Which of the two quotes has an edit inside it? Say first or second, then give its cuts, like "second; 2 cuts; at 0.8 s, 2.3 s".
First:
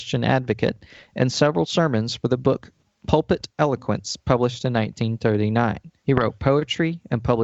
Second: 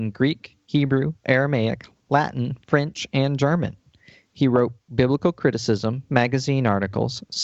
first; 1 cut; at 6.0 s